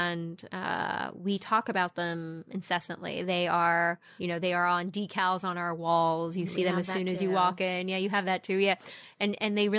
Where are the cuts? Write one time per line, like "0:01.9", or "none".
0:04.2